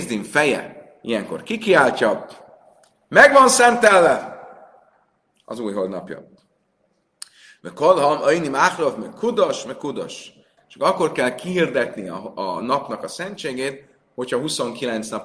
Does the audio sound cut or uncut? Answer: cut